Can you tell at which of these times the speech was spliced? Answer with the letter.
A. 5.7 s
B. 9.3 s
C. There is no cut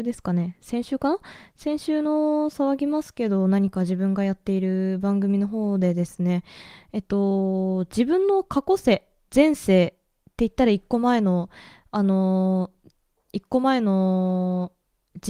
B